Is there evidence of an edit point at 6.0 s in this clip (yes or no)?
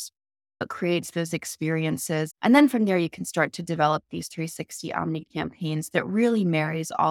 no